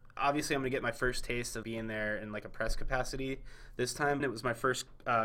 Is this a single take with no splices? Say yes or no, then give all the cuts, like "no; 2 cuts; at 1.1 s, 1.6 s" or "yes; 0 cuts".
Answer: no; 2 cuts; at 1.6 s, 4.2 s